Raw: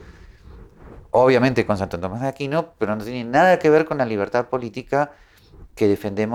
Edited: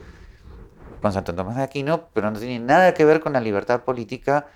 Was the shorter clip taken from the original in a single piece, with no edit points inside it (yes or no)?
no